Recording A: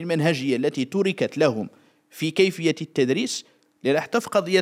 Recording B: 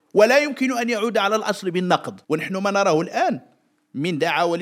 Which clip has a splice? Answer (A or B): B